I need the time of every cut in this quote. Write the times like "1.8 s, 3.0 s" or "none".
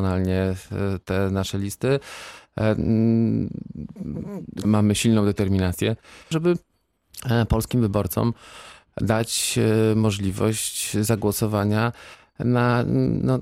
4.6 s, 6.3 s